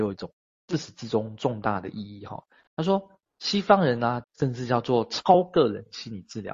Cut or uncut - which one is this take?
cut